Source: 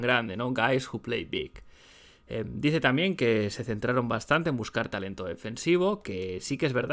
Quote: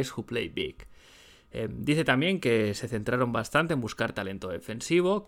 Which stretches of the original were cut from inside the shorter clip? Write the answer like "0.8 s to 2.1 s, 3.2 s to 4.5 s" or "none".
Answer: none